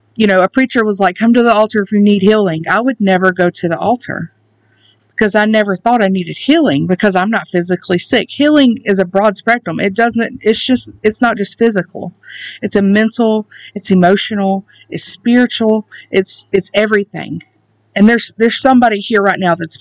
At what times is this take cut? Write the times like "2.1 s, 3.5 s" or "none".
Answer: none